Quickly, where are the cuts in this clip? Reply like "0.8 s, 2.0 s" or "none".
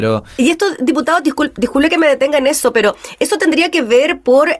none